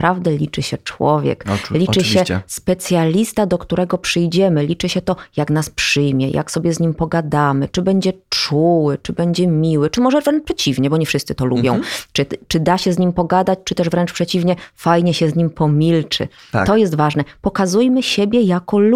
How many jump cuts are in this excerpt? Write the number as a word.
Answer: zero